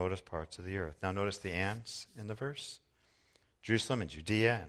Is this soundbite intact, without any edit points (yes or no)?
yes